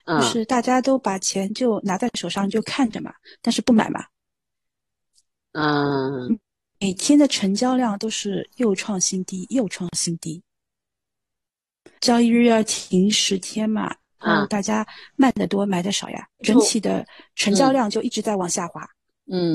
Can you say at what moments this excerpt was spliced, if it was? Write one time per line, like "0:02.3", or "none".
0:12.0